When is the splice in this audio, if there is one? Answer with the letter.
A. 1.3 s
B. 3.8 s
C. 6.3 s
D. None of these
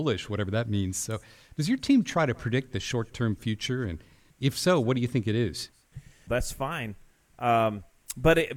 C